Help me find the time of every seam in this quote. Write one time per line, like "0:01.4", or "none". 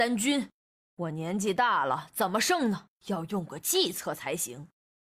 0:03.0